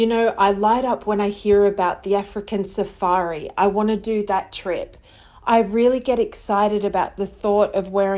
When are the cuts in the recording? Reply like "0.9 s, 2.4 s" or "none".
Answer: none